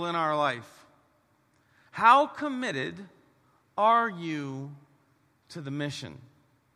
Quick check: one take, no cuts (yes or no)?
yes